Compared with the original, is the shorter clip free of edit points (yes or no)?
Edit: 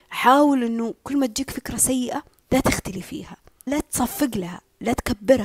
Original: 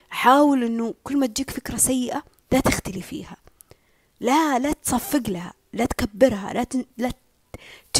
no